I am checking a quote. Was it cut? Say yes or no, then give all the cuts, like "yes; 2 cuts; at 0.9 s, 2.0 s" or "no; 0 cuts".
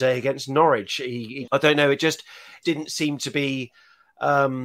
yes; 2 cuts; at 1.5 s, 2.6 s